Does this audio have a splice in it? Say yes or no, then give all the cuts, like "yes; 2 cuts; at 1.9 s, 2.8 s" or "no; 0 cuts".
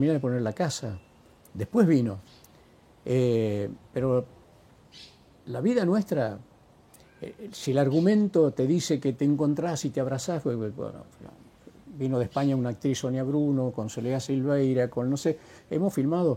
no; 0 cuts